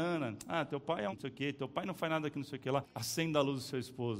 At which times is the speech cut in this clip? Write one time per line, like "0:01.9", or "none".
0:01.1
0:02.8